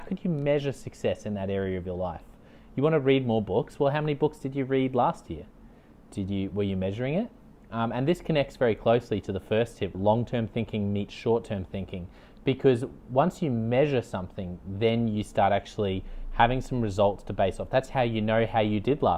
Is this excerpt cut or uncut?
cut